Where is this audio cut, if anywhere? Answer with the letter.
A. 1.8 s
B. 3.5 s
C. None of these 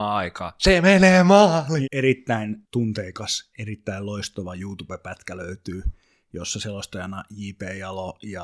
A